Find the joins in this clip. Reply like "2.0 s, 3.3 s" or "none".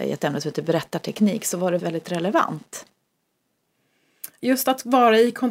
1.8 s, 4.4 s